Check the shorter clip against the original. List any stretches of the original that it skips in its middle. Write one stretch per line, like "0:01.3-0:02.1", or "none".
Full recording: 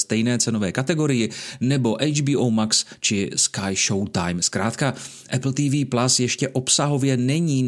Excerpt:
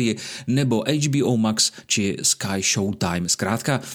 none